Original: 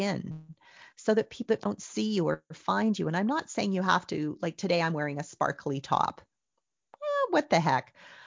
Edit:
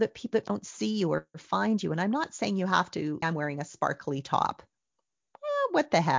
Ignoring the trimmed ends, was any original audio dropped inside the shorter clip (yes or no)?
yes